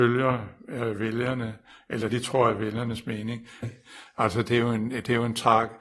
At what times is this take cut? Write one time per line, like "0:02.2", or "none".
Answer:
0:02.1
0:03.6